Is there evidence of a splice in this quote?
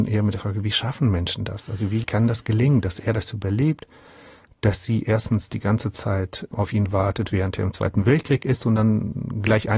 no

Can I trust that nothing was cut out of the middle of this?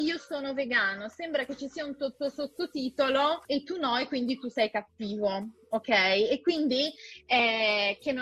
no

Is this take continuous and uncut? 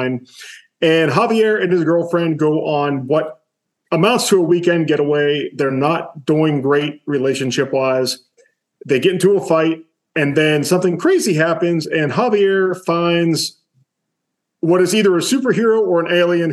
yes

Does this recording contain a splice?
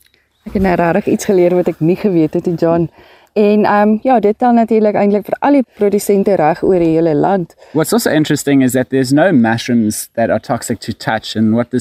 no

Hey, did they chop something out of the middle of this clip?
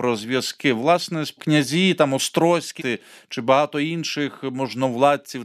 yes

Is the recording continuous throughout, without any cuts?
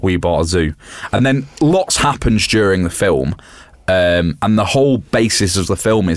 yes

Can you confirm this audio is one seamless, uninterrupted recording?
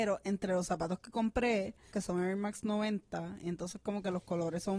no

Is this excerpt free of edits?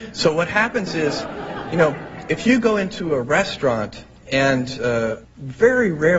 no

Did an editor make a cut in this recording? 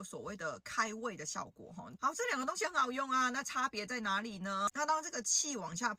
yes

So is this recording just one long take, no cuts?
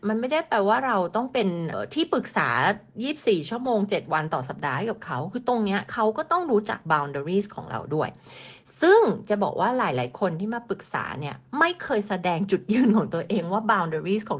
no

